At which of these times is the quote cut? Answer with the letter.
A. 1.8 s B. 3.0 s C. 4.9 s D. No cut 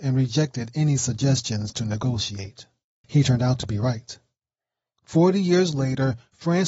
B